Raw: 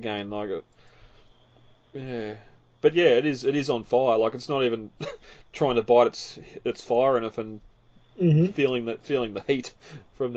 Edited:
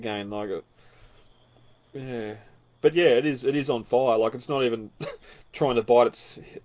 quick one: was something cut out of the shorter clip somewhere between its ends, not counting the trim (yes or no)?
no